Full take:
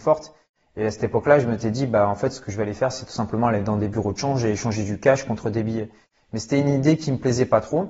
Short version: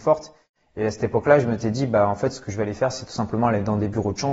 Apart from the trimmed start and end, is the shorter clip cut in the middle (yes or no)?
no